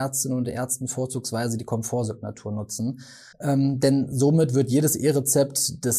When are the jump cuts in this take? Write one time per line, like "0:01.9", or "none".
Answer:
0:03.3